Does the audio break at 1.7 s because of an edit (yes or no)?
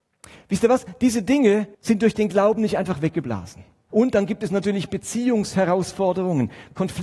yes